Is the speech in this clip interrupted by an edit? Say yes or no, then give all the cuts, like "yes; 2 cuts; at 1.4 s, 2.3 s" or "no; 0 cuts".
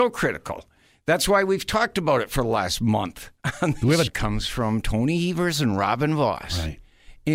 yes; 1 cut; at 4.1 s